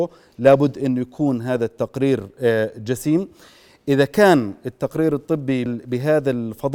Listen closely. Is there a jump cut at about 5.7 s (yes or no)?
yes